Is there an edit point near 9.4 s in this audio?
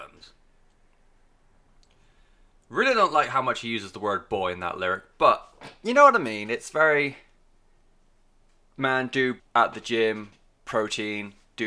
yes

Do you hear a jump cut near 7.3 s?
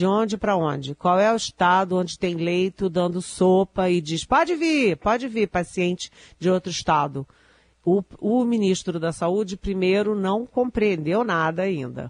no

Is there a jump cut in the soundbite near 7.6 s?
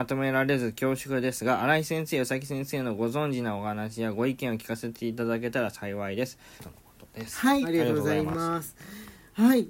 yes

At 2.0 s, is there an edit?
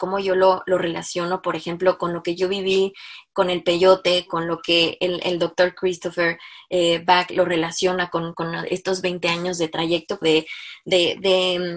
no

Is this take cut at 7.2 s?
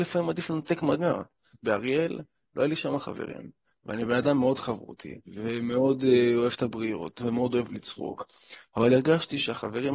yes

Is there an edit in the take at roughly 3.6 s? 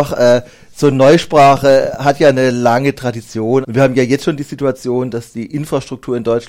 yes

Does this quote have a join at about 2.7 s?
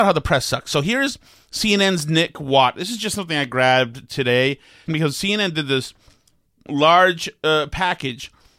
no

